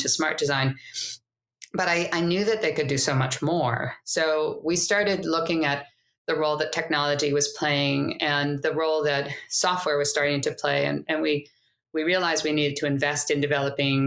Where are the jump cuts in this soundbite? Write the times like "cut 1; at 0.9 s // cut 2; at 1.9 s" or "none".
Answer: none

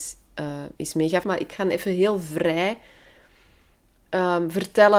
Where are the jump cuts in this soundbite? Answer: cut 1; at 1.2 s

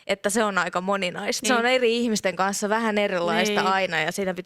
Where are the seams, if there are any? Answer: cut 1; at 1.4 s

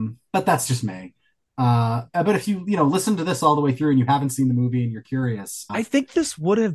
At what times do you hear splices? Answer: cut 1; at 5.7 s

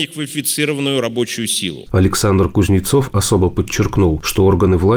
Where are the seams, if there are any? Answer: cut 1; at 1.9 s

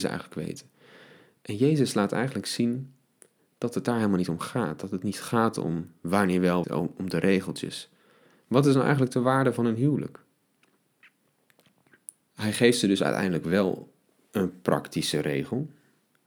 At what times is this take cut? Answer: cut 1; at 6.6 s // cut 2; at 12.2 s

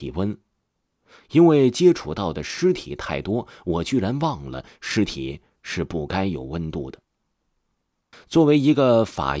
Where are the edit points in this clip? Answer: cut 1; at 8.1 s

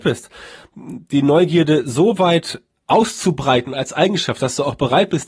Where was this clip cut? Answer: cut 1; at 2.7 s

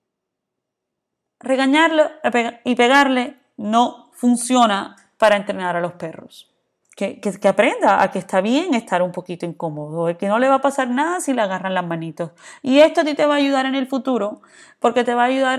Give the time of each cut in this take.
cut 1; at 6.8 s

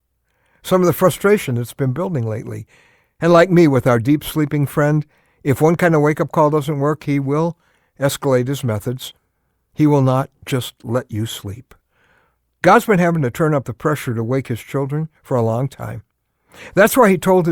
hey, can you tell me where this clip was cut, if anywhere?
cut 1; at 3.2 s

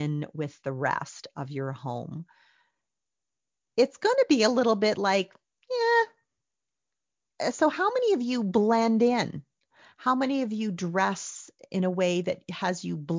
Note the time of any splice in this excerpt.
none

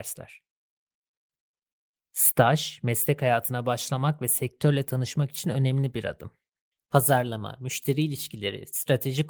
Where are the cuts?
cut 1; at 6.7 s

